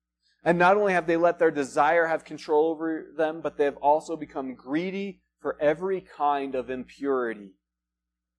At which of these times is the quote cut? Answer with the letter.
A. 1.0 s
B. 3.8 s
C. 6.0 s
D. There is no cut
D